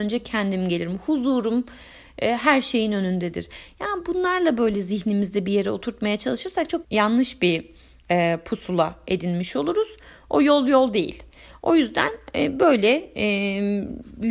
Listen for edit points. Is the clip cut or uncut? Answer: cut